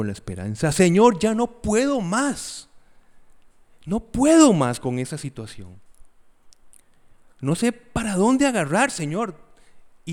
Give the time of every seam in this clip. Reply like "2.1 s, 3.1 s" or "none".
none

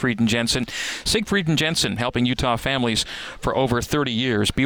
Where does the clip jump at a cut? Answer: none

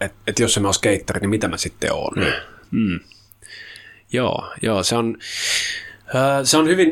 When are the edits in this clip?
none

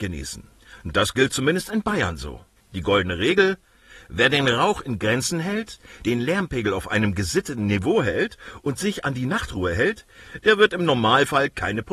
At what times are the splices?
2.6 s

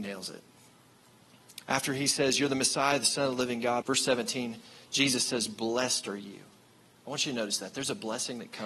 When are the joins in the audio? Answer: 1.6 s, 3.8 s

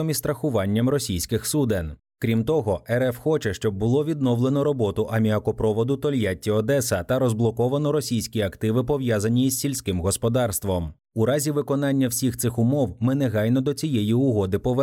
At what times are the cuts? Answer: none

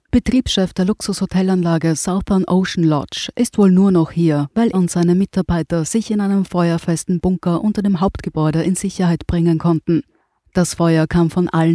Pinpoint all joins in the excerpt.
4.7 s

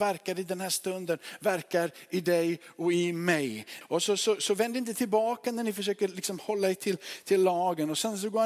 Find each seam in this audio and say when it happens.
3.8 s

